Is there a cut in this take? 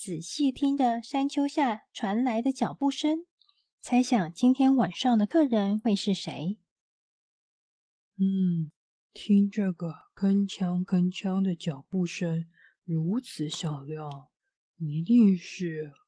no; 0 cuts

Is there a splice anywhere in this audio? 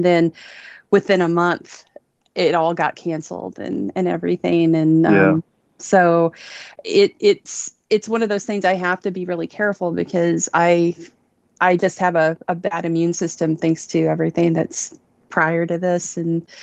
no; 0 cuts

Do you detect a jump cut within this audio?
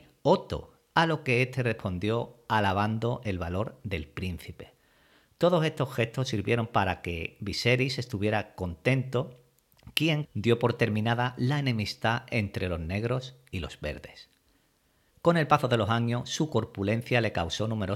yes; 1 cut; at 10.3 s

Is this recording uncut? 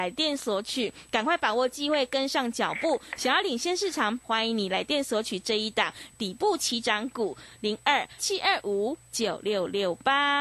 no; 2 cuts; at 4.2 s, 8.2 s

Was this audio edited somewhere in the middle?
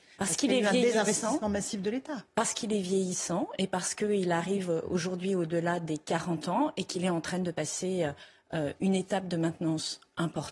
no; 0 cuts

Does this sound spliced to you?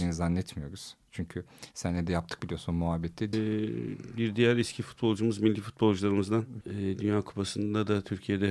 yes; 2 cuts; at 3.3 s, 6.6 s

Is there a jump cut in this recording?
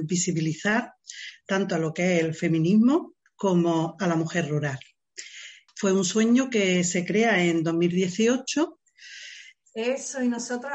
yes; 2 cuts; at 5.7 s, 9.6 s

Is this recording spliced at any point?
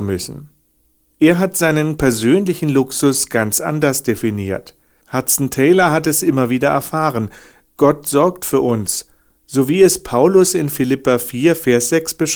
yes; 2 cuts; at 1.1 s, 5.0 s

